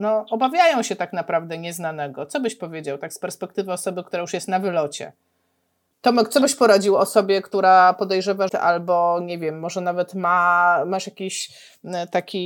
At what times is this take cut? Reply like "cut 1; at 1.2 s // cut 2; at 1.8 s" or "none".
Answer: cut 1; at 5.9 s // cut 2; at 8.5 s